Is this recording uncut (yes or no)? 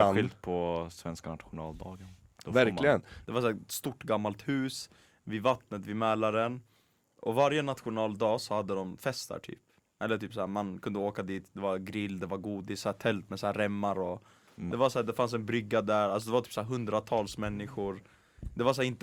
no